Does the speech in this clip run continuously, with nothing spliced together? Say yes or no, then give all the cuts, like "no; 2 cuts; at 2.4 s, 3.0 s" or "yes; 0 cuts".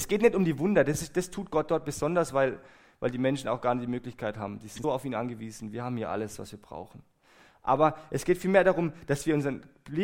no; 1 cut; at 4.8 s